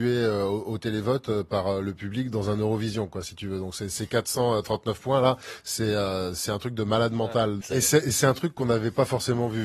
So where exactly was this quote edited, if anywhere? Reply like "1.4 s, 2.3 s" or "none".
7.6 s

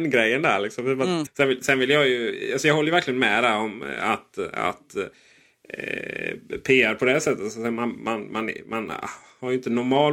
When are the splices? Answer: 1.3 s

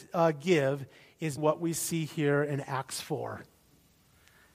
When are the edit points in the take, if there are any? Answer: 1.4 s

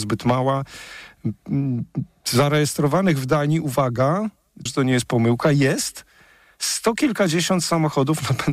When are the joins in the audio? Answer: 4.7 s

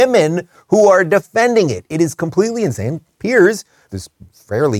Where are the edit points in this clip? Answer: 3.9 s

